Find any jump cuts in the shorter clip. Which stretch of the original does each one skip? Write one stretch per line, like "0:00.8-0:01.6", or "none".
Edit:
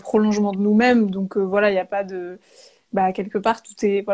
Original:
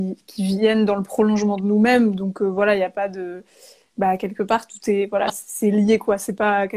none